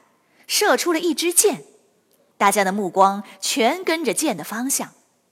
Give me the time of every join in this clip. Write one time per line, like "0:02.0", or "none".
0:02.3